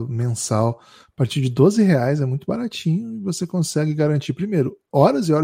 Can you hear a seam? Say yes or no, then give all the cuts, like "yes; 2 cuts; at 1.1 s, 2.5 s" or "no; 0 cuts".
no; 0 cuts